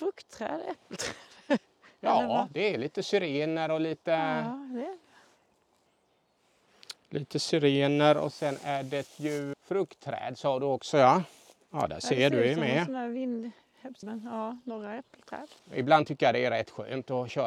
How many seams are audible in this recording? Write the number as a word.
three